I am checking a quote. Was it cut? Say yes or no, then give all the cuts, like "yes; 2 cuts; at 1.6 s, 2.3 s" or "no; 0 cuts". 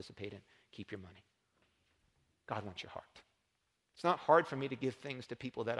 yes; 1 cut; at 3.8 s